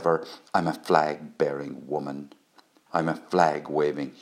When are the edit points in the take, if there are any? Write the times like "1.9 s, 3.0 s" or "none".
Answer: 2.9 s